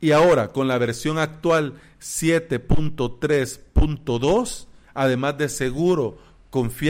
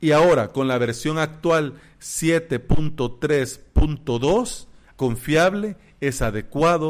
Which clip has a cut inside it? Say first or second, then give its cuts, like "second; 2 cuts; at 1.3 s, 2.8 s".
second; 1 cut; at 4.9 s